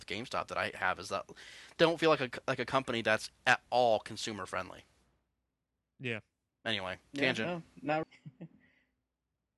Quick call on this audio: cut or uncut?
cut